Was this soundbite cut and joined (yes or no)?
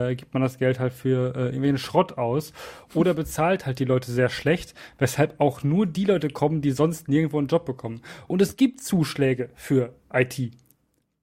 yes